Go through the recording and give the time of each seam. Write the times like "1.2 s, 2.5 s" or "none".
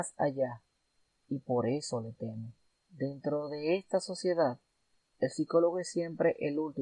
1.1 s, 2.7 s

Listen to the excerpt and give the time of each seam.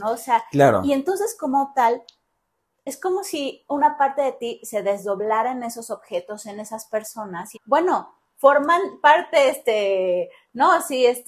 7.5 s

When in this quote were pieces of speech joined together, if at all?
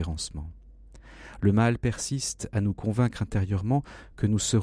none

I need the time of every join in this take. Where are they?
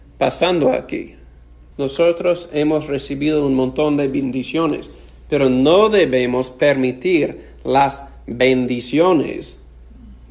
1.7 s

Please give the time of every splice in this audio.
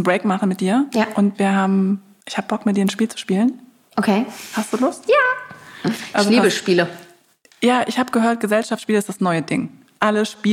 none

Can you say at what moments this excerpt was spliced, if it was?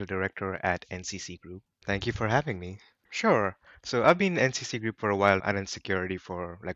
1.7 s, 3.0 s, 5.4 s

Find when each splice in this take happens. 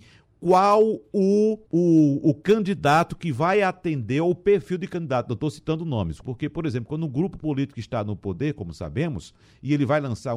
1.7 s, 6.2 s

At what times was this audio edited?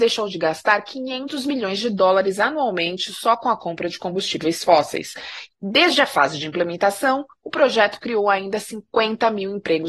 5.5 s

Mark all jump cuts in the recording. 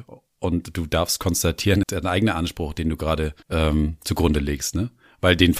1.8 s, 3.4 s

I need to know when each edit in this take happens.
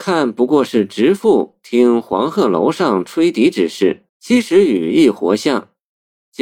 4.1 s

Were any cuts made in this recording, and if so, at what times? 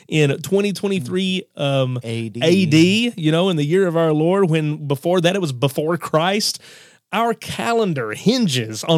none

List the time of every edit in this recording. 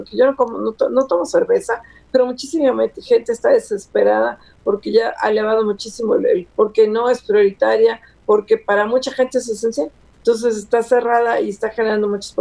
6.5 s

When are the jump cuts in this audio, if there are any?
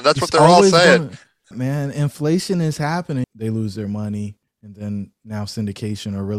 1.5 s, 3.2 s

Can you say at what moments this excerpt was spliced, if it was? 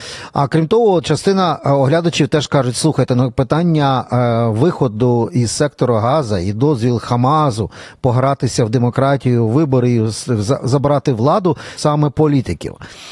11.8 s

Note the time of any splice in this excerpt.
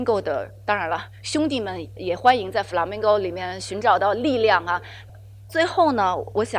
2.0 s

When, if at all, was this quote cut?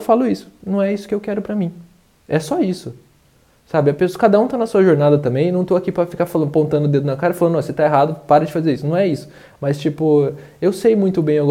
none

